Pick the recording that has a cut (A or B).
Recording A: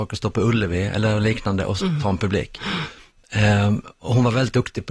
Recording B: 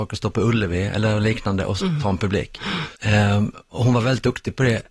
B